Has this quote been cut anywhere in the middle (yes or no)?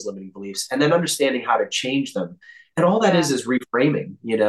no